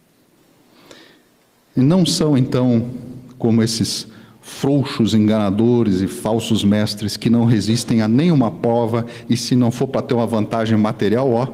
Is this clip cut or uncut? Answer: uncut